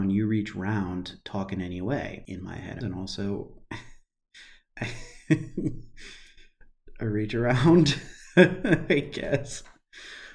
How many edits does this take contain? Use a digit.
1